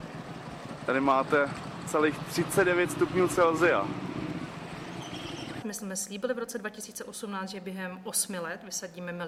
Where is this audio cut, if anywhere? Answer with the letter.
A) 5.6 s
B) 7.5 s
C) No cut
A